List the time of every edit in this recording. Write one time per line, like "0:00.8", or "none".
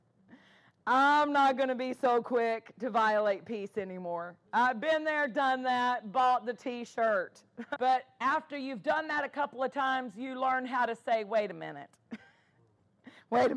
0:04.5
0:07.8